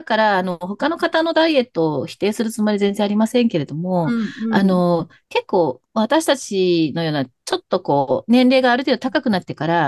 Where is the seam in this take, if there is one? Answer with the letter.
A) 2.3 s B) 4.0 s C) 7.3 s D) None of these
D